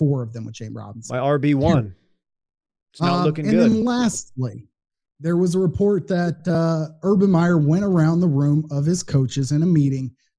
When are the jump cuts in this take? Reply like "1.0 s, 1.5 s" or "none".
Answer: none